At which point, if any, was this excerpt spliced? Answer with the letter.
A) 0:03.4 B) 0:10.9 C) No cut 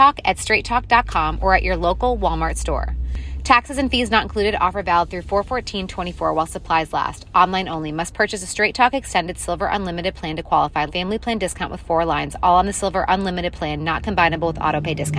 B